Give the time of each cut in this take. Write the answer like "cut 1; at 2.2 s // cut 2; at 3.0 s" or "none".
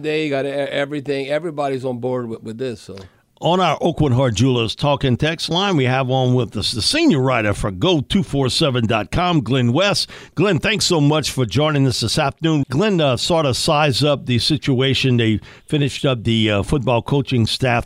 cut 1; at 12.6 s